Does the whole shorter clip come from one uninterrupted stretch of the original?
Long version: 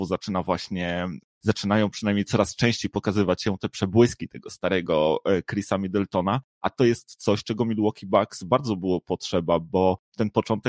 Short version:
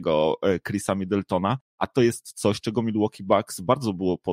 yes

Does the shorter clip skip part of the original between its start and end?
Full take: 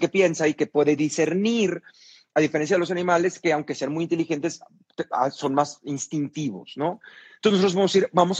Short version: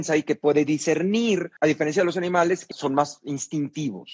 yes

